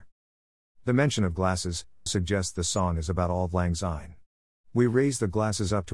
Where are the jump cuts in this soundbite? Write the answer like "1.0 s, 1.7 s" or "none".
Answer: 2.1 s